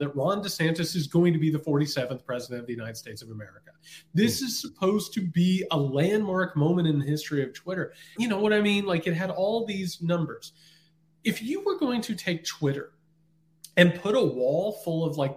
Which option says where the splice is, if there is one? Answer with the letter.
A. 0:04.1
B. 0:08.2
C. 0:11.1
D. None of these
B